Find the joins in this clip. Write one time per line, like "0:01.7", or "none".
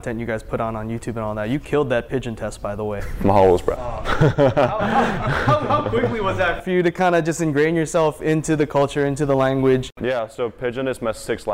none